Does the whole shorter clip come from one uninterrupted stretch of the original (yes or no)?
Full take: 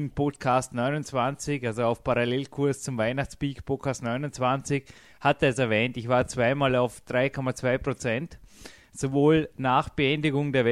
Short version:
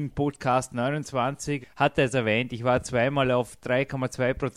no